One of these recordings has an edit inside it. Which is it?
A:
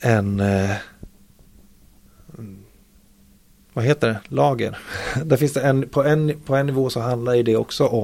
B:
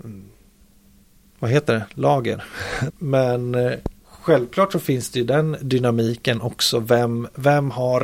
B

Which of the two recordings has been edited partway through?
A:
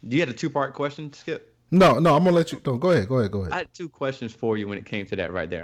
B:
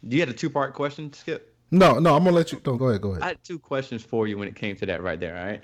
B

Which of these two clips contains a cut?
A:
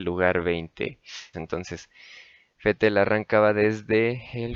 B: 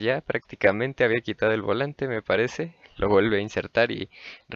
A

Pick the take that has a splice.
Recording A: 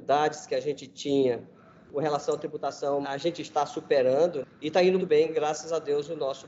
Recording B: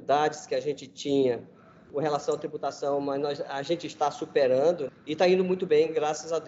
A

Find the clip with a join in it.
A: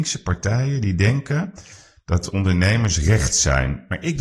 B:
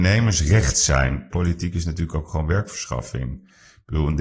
B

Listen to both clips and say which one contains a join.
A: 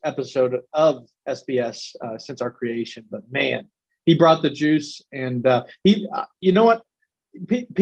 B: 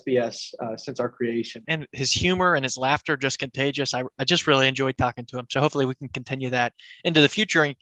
B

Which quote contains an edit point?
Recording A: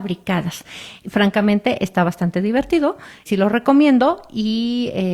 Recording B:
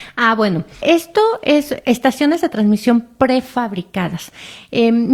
A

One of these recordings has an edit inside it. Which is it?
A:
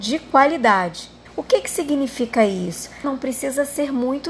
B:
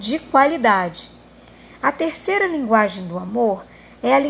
A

